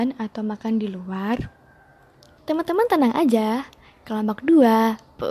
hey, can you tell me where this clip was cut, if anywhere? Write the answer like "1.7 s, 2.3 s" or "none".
2.4 s